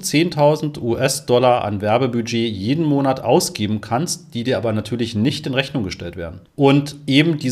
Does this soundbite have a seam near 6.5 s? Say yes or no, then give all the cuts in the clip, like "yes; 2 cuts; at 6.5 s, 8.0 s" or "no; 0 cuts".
yes; 1 cut; at 6.5 s